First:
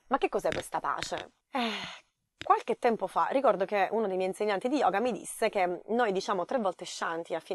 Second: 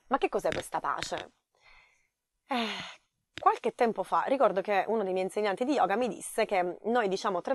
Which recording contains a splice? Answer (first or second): first